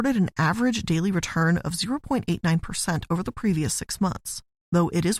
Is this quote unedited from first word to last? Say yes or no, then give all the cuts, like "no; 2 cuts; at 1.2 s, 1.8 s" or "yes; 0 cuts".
yes; 0 cuts